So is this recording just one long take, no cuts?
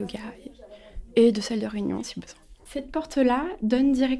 yes; 0 cuts

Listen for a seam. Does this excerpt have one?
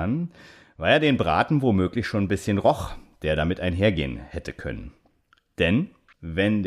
no; 0 cuts

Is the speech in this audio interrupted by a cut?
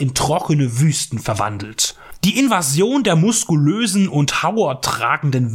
yes; 1 cut; at 2.1 s

